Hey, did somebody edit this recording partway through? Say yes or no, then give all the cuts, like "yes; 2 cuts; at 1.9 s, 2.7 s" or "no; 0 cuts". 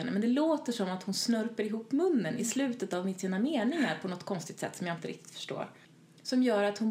no; 0 cuts